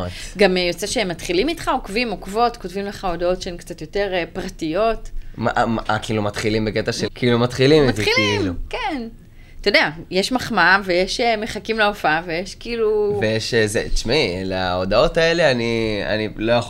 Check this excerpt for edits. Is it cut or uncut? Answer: cut